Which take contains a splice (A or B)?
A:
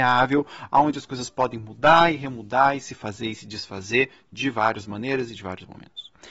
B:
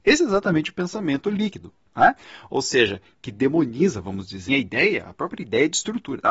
B